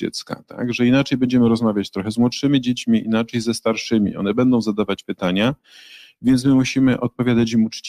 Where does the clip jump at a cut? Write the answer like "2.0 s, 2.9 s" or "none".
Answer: none